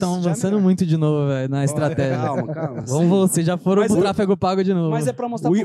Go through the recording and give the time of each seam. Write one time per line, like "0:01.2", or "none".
none

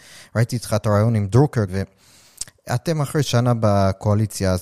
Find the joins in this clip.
0:01.7

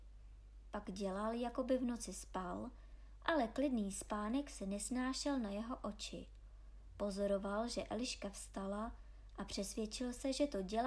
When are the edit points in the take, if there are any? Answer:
none

